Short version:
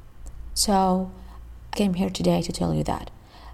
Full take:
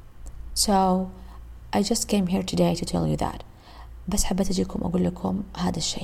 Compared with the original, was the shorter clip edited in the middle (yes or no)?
yes